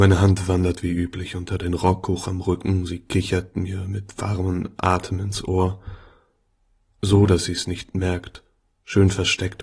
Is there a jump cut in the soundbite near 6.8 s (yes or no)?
yes